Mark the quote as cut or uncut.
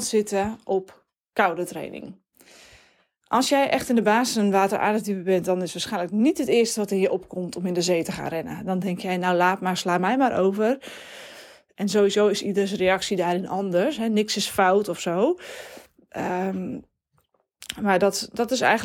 cut